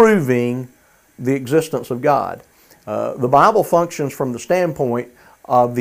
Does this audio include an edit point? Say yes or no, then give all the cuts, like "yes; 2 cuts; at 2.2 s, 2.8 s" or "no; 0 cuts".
yes; 1 cut; at 1.1 s